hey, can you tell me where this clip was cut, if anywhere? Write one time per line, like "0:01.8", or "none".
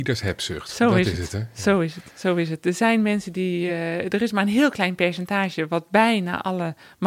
none